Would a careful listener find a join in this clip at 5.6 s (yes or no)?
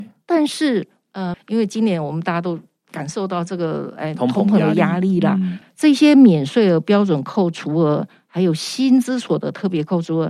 yes